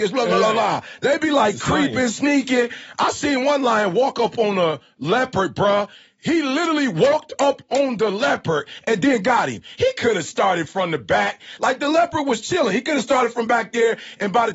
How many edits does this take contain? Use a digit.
0